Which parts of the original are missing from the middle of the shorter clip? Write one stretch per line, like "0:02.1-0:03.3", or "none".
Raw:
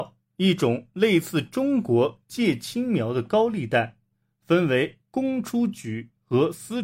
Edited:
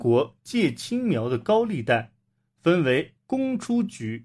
none